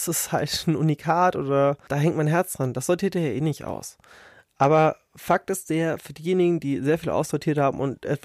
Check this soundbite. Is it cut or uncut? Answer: cut